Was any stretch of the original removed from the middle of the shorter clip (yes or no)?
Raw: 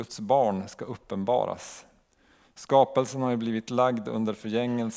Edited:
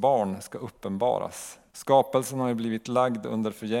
yes